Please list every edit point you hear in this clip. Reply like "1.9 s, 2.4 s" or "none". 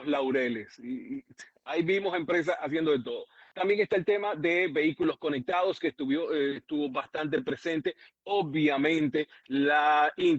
none